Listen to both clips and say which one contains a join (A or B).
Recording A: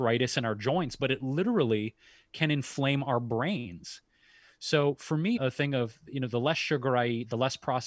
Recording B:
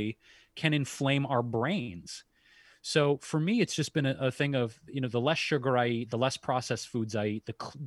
A